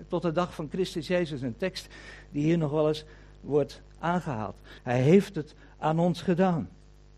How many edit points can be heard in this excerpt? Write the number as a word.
one